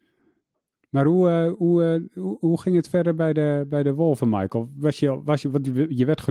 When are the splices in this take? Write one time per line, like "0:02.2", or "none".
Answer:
none